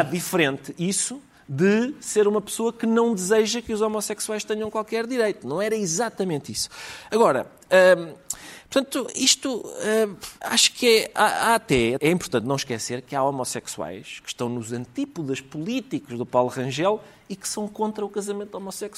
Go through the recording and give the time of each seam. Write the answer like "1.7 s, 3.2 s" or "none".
10.4 s, 12.0 s